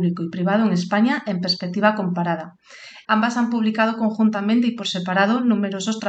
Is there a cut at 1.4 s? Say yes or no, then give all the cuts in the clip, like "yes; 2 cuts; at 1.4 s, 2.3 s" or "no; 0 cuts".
no; 1 cut; at 3.0 s